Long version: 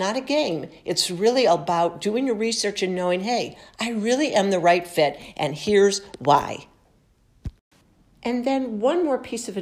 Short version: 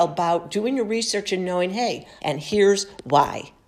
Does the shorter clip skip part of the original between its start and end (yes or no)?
yes